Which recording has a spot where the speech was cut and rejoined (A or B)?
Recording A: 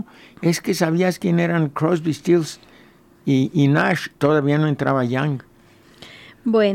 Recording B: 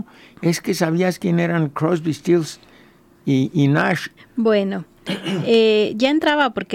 B